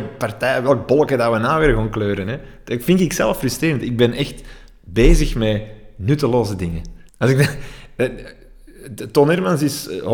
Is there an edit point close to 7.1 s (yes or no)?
yes